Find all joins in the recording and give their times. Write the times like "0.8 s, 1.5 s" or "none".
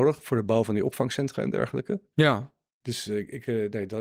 2.1 s